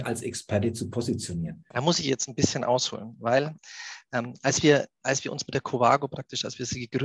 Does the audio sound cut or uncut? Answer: cut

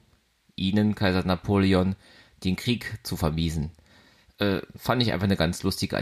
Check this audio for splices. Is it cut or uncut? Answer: uncut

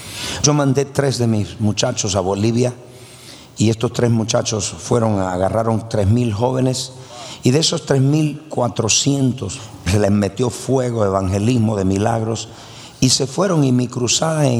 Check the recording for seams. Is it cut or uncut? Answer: uncut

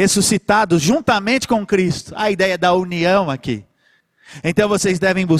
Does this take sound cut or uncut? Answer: uncut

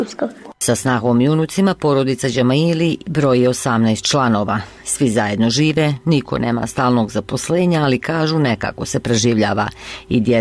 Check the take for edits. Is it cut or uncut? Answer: uncut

